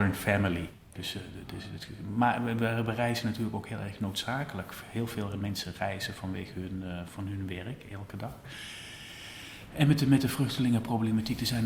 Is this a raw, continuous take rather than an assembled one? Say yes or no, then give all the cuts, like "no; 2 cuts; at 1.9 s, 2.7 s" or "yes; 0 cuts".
no; 1 cut; at 1.0 s